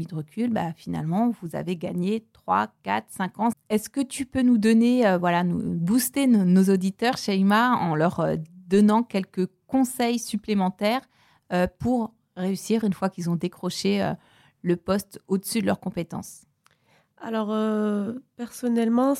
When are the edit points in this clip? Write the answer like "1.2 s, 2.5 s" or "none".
3.5 s